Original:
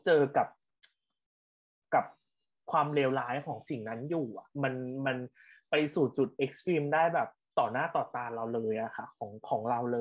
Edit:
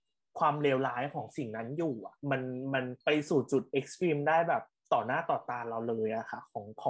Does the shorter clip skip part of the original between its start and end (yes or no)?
yes